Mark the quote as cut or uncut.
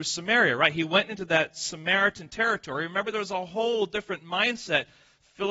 uncut